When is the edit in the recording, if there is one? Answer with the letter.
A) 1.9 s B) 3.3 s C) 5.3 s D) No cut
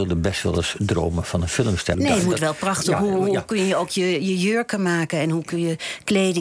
A